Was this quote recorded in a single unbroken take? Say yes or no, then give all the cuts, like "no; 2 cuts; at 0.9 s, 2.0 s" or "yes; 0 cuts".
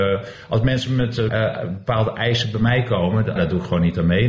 no; 2 cuts; at 1.3 s, 3.4 s